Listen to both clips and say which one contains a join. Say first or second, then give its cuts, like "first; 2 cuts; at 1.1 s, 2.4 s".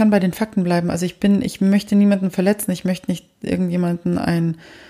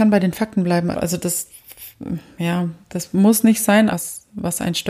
second; 2 cuts; at 0.9 s, 3.9 s